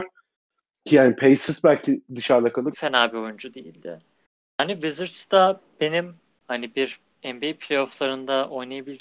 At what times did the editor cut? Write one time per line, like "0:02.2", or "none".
0:02.7
0:04.4